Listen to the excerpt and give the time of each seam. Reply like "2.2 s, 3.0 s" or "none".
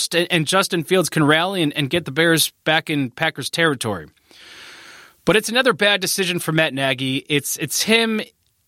none